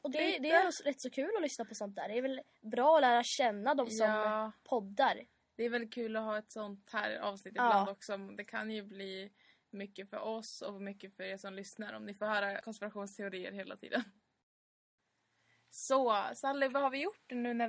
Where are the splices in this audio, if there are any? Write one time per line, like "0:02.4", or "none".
none